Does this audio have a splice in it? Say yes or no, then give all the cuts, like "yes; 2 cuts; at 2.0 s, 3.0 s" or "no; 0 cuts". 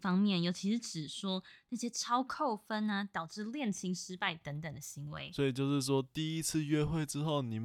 no; 0 cuts